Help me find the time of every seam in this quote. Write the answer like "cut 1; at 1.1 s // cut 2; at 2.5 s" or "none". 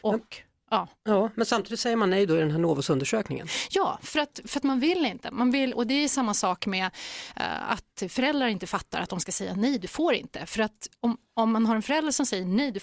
none